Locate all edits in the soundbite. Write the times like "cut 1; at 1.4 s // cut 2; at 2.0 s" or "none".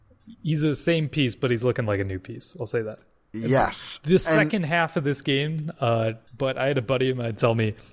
cut 1; at 6.3 s